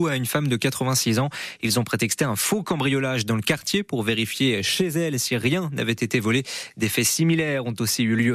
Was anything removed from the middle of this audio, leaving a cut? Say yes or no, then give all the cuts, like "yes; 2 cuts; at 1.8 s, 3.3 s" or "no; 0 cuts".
no; 0 cuts